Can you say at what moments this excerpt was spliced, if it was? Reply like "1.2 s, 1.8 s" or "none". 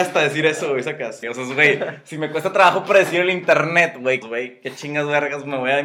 1.2 s, 4.2 s